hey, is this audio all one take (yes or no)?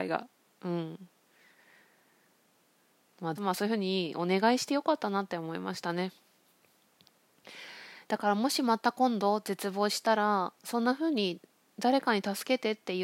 no